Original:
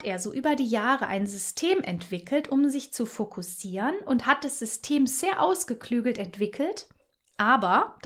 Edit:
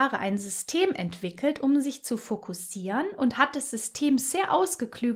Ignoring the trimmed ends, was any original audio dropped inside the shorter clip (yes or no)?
no